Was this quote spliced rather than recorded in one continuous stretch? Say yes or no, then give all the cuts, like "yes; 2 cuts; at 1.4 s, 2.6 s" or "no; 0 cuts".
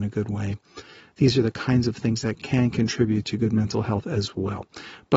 no; 0 cuts